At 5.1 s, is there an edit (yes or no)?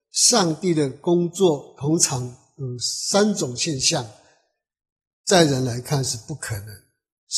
yes